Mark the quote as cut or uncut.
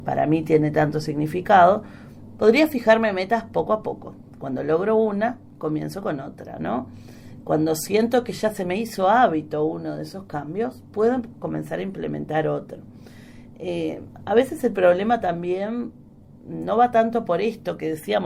cut